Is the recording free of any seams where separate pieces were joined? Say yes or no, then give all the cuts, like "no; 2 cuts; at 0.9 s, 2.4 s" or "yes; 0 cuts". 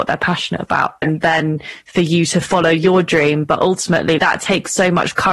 no; 2 cuts; at 1.0 s, 4.2 s